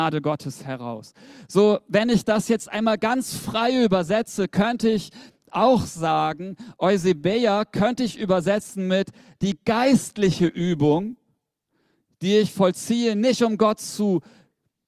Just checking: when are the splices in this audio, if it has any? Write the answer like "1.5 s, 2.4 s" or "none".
none